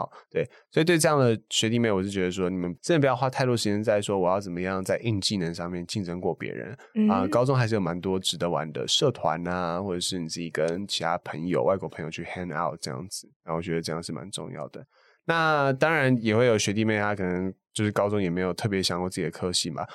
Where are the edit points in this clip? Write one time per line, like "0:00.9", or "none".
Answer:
none